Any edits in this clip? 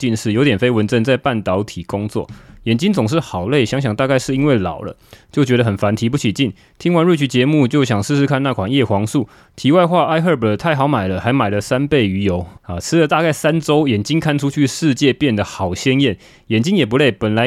yes; 1 cut; at 12.6 s

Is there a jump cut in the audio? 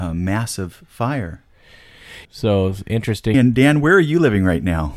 yes; 2 cuts; at 2.3 s, 3.3 s

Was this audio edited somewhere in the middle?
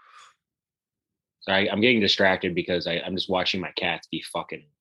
no; 0 cuts

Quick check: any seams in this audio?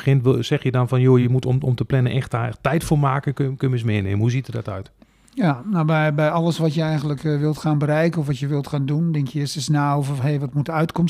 no; 0 cuts

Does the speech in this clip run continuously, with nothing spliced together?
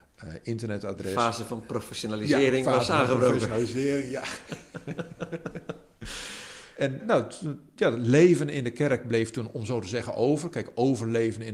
no; 1 cut; at 7.0 s

